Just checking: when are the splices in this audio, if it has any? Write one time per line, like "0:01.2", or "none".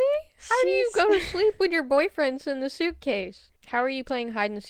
0:03.5